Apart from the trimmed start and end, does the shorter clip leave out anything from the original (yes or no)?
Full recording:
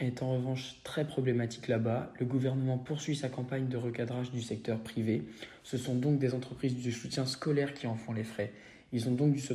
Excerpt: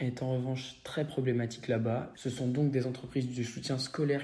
yes